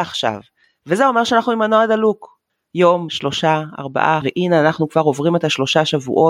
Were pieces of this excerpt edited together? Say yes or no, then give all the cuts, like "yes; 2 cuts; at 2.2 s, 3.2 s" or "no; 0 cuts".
yes; 2 cuts; at 3.1 s, 4.2 s